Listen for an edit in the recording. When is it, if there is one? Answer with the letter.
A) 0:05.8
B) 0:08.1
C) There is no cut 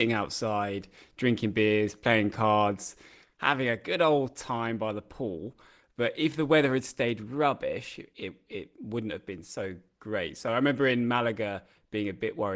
C